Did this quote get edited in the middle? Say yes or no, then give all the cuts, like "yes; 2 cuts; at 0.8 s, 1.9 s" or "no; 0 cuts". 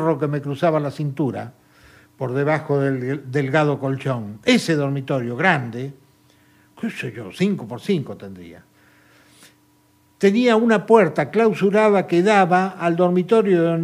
no; 0 cuts